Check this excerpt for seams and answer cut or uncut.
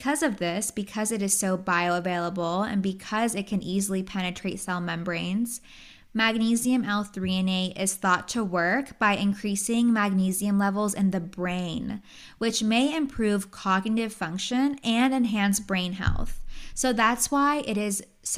uncut